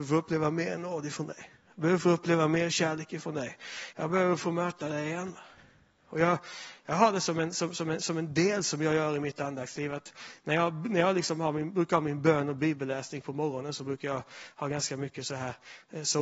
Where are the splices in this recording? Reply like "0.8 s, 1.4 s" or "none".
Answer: 3.9 s